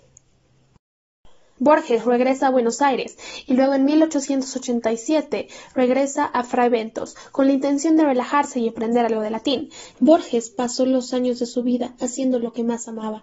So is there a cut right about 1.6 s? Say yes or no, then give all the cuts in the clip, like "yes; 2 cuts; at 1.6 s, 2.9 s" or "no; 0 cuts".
yes; 2 cuts; at 1.6 s, 9.9 s